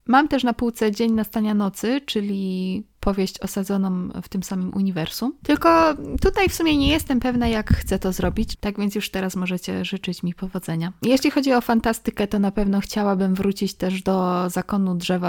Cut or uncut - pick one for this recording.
cut